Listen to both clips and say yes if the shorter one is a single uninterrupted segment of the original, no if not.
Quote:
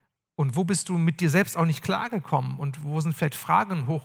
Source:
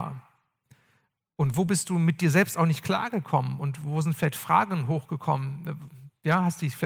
yes